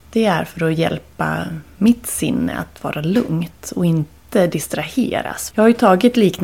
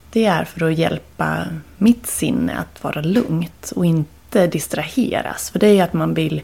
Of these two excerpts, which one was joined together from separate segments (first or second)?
first